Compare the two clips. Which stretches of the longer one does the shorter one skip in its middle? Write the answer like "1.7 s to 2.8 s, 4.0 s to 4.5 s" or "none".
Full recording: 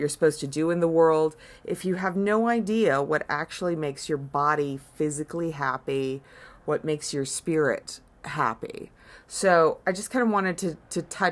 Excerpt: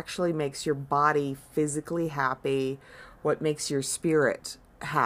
none